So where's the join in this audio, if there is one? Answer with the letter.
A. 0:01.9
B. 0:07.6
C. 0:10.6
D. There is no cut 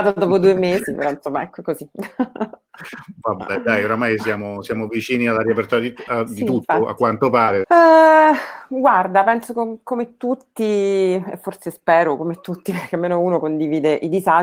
B